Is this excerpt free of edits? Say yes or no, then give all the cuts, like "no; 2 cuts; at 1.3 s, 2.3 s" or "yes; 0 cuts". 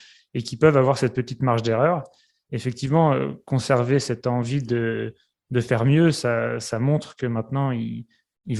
yes; 0 cuts